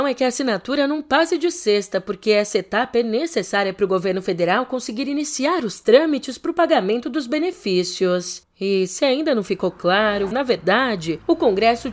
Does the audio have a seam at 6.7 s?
no; 2 cuts; at 8.4 s, 10.3 s

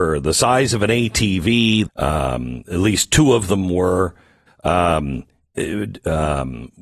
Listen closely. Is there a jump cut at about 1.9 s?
yes; 2 cuts; at 1.9 s, 4.5 s

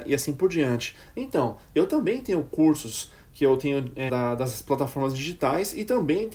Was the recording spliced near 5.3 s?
no; 2 cuts; at 1.1 s, 4.1 s

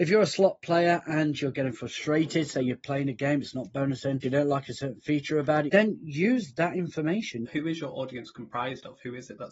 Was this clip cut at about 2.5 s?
no; 3 cuts; at 4.2 s, 5.7 s, 7.4 s

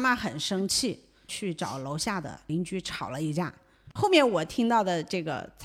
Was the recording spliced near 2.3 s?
no; 1 cut; at 4.0 s

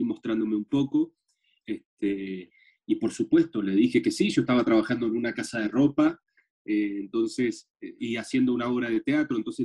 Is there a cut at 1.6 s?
yes; 2 cuts; at 1.6 s, 8.0 s

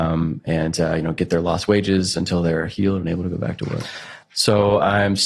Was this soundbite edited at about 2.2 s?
no; 1 cut; at 4.2 s

